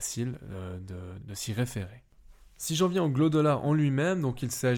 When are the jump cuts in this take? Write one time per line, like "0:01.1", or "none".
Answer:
0:01.2